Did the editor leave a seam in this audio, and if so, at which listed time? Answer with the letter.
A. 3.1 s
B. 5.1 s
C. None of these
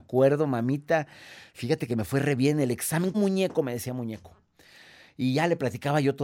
A